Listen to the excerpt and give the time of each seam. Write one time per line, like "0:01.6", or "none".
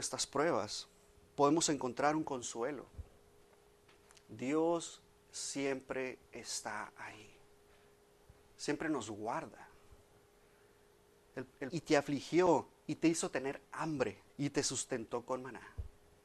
0:11.7
0:14.3